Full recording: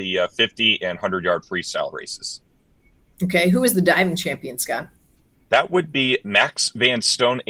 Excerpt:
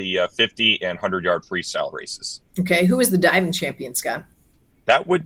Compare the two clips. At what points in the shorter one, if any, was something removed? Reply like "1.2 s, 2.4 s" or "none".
2.5 s